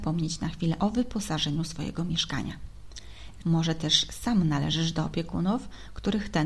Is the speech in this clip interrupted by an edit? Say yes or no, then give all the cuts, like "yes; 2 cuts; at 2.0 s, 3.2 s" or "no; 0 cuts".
yes; 1 cut; at 3.4 s